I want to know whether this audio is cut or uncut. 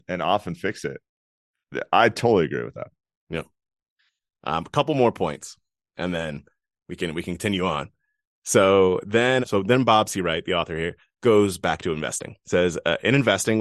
cut